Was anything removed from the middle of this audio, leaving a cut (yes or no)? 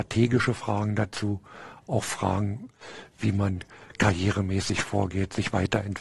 no